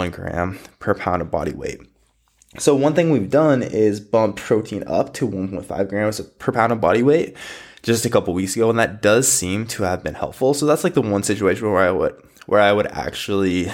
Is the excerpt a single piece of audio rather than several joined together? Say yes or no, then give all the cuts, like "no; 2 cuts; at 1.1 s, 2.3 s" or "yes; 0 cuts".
yes; 0 cuts